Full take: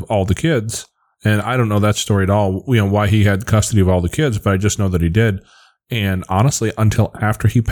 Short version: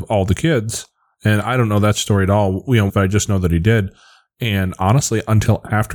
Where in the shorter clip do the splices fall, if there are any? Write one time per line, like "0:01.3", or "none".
0:02.9